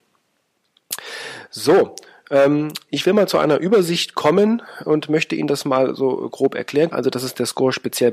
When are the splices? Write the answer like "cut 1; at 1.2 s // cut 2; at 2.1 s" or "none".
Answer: cut 1; at 6.9 s